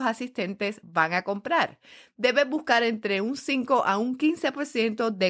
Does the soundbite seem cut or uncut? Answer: uncut